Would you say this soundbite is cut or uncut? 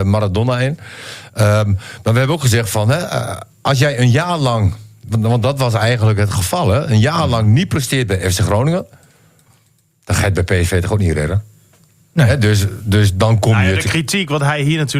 uncut